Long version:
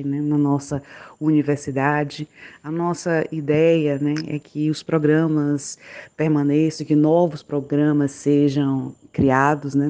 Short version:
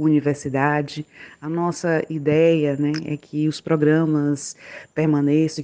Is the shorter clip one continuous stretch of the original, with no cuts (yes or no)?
yes